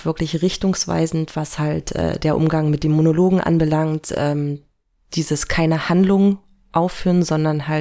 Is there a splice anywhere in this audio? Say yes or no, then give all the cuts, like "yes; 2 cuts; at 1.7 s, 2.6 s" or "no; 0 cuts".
no; 0 cuts